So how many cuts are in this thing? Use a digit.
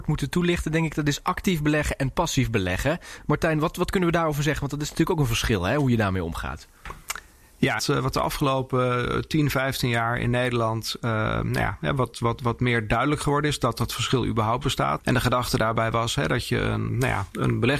3